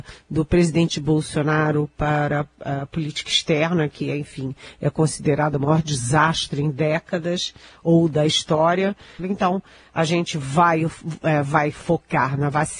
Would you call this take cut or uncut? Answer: cut